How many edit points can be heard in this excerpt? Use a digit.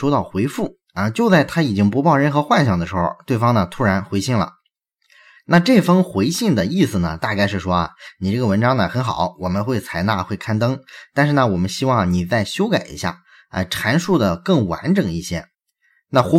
0